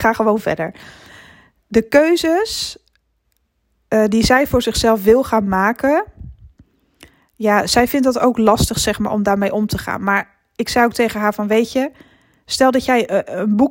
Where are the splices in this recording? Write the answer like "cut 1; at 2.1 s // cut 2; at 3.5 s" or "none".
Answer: none